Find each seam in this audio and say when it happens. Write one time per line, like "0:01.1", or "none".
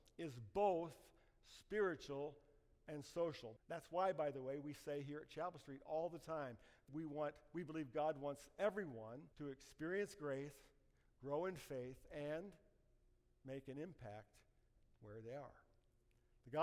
0:03.6
0:06.9
0:09.3